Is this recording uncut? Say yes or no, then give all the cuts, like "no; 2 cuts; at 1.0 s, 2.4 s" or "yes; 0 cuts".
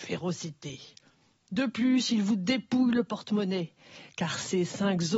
yes; 0 cuts